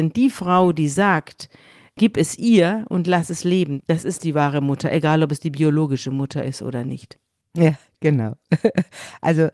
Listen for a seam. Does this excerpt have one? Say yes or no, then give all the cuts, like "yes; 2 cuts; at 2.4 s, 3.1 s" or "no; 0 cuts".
yes; 1 cut; at 3.8 s